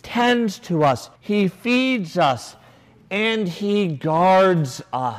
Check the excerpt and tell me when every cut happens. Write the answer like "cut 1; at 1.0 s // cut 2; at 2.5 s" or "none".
cut 1; at 1.2 s